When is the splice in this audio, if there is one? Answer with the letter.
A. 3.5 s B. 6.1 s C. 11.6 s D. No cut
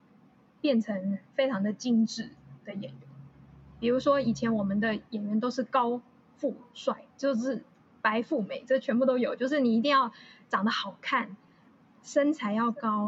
D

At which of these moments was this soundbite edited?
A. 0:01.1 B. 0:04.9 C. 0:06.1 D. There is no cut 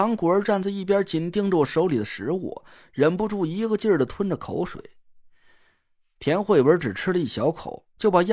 D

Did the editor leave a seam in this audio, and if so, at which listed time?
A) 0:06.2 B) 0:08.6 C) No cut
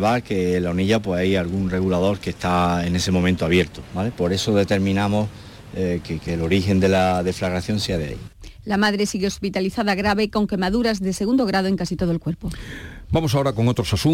A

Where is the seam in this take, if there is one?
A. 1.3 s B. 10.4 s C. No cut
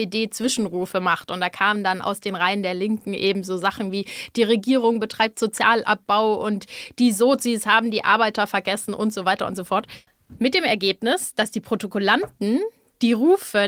C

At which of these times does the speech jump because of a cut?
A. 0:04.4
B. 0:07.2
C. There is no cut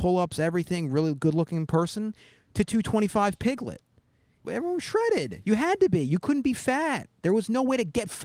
A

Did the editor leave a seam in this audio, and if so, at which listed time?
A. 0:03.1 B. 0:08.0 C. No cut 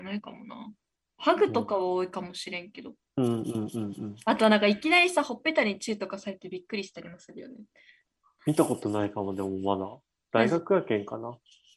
B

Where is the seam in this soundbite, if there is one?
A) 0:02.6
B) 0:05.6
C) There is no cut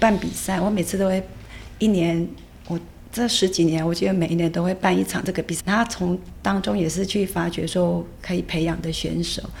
B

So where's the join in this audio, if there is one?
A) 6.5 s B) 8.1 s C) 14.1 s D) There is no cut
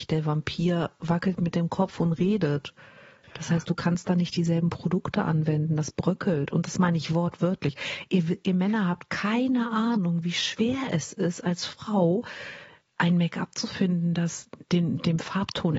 D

